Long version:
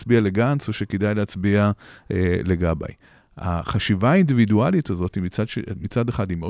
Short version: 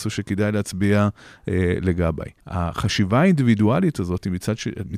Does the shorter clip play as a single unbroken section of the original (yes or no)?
no